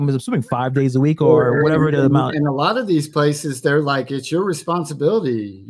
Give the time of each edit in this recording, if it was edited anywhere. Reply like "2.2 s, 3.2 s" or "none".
none